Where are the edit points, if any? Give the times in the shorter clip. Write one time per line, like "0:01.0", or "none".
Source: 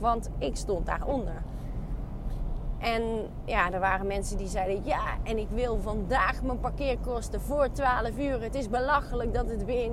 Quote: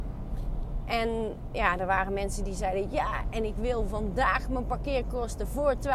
none